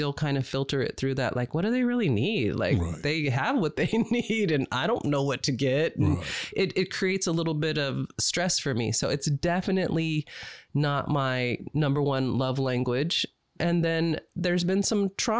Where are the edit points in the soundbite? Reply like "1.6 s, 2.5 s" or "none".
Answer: none